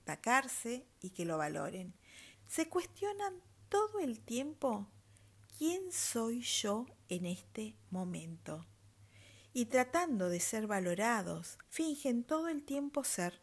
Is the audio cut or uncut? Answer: cut